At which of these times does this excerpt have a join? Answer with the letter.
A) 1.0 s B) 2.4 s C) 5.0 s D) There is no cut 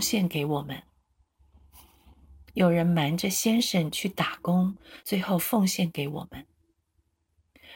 C